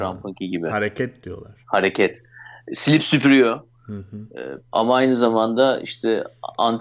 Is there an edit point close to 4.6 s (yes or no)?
yes